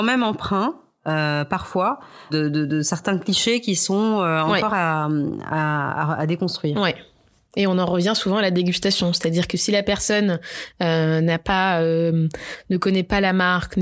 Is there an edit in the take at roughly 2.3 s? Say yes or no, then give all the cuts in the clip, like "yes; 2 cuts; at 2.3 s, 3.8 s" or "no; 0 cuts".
yes; 1 cut; at 2.3 s